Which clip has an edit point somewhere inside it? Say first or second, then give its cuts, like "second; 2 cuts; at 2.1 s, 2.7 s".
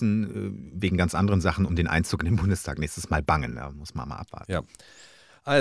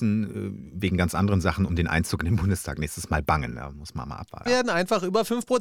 second; 1 cut; at 4.5 s